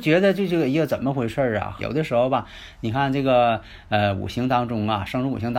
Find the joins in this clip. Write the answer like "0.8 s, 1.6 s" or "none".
1.8 s